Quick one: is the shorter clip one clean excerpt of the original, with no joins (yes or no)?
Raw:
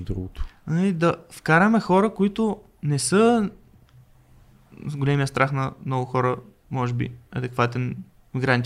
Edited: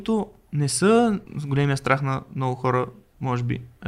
no